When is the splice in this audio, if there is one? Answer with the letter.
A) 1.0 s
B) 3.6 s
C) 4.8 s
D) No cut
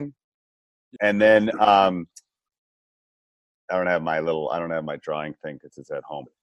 A